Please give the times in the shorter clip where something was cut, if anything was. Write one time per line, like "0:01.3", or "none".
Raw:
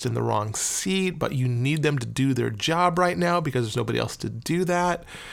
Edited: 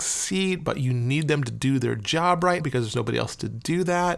0:02.6